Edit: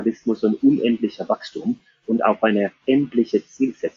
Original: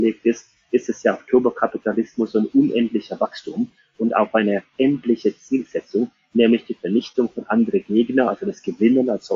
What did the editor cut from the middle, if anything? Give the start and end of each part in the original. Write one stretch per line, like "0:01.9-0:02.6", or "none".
none